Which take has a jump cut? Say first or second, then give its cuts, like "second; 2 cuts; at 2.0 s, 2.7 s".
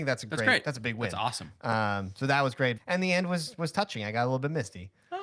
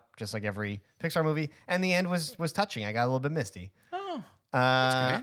first; 1 cut; at 2.8 s